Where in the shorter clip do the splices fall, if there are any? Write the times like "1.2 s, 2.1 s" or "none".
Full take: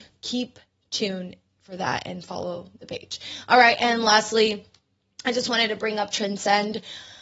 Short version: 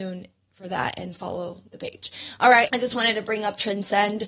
2.7 s